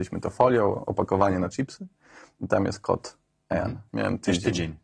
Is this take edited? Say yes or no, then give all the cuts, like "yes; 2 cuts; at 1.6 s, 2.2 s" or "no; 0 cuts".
yes; 1 cut; at 3.9 s